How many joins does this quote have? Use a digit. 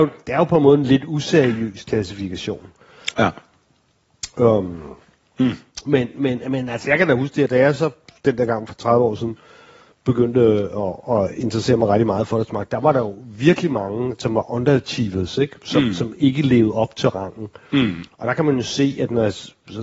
1